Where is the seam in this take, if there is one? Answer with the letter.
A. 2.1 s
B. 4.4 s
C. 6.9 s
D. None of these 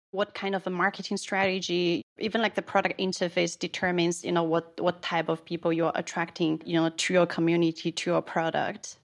D